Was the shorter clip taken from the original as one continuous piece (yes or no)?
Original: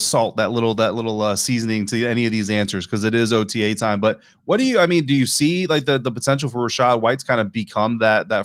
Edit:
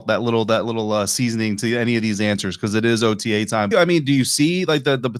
no